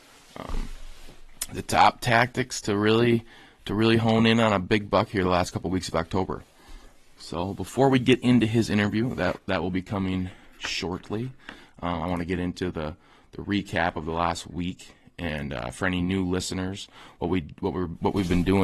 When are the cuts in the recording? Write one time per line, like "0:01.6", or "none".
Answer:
none